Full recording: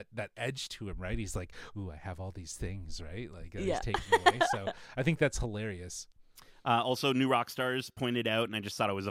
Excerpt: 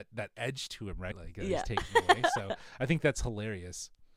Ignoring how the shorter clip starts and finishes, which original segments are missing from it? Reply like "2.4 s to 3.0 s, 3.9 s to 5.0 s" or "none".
1.1 s to 3.3 s